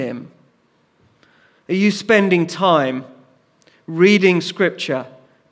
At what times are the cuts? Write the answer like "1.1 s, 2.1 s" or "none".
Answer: 1.5 s